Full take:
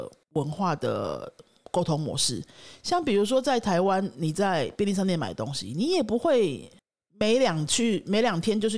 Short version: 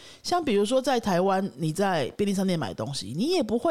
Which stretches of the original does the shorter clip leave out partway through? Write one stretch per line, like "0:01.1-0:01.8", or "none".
none